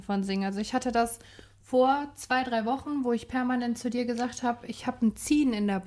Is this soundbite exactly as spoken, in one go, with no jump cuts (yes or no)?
yes